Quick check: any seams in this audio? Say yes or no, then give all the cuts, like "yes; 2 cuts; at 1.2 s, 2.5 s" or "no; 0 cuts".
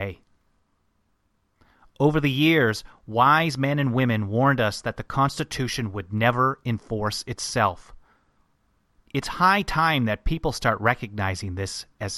no; 0 cuts